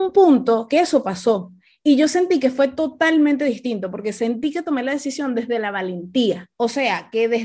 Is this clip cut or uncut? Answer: cut